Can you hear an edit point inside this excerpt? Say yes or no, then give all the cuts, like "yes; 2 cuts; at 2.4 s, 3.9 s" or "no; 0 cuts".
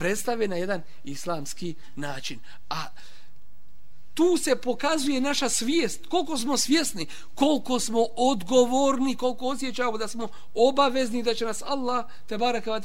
no; 0 cuts